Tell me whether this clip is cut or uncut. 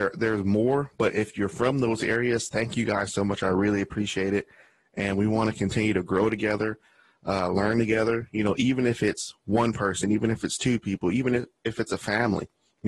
uncut